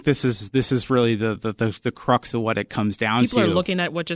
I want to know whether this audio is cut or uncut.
uncut